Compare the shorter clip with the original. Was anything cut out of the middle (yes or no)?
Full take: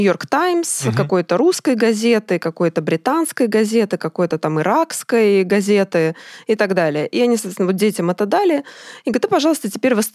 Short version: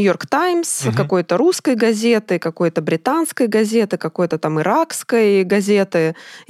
no